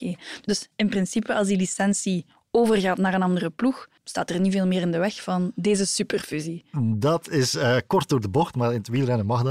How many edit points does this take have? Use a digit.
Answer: 1